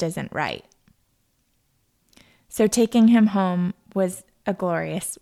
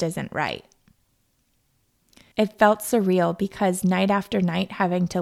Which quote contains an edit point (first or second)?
second